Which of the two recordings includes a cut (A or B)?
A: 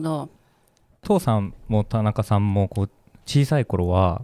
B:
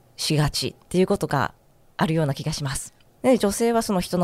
B